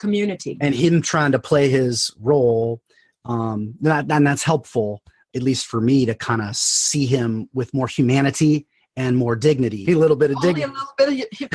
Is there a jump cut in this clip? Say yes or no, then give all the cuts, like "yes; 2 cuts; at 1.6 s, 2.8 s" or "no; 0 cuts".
yes; 2 cuts; at 5.3 s, 9.8 s